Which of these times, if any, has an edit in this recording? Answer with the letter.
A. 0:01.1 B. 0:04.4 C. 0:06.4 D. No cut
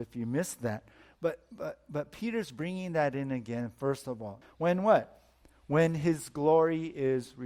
B